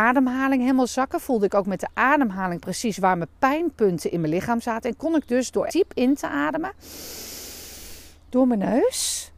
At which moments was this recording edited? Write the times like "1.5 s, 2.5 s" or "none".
5.7 s